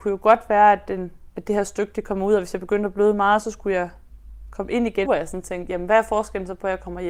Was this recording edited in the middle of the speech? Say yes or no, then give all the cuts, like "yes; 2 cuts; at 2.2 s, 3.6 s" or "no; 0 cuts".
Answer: yes; 1 cut; at 5.0 s